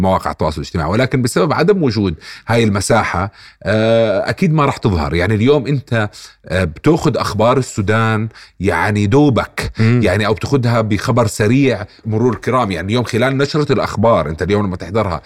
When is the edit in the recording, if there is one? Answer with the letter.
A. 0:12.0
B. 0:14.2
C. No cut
A